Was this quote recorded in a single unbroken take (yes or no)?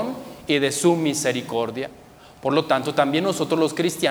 yes